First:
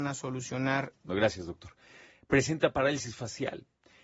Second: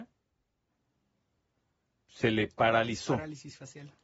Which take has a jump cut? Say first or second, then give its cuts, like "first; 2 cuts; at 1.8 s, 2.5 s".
first; 1 cut; at 1.1 s